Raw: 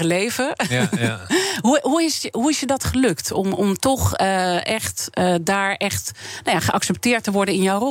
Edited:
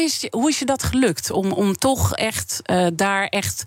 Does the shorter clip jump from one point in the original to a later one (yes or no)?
yes